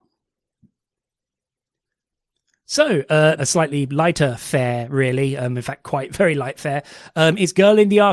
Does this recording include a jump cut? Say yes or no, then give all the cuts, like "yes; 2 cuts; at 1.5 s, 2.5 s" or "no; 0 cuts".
yes; 1 cut; at 3.4 s